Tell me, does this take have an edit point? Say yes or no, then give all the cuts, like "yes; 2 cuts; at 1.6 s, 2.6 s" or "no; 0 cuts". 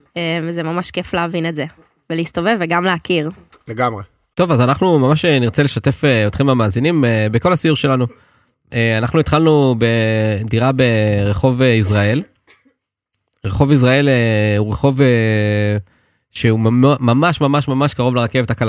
no; 0 cuts